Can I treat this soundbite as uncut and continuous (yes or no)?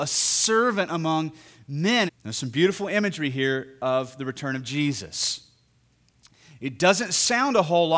no